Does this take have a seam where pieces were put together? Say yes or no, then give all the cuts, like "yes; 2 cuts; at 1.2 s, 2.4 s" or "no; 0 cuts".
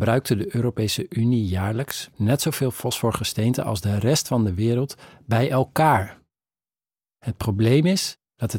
yes; 1 cut; at 2.1 s